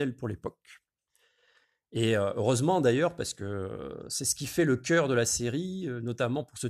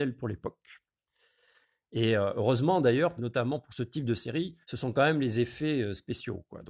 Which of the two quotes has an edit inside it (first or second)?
second